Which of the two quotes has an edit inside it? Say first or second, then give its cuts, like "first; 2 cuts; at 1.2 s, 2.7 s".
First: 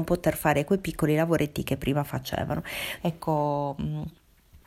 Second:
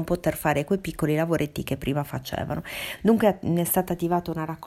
first; 1 cut; at 3.0 s